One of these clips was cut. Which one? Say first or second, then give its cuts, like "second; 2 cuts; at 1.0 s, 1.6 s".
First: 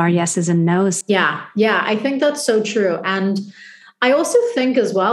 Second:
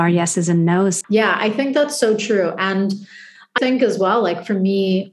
second; 2 cuts; at 1.0 s, 3.6 s